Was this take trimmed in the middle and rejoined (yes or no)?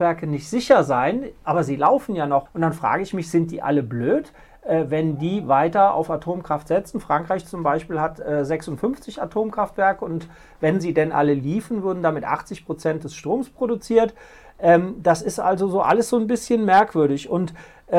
yes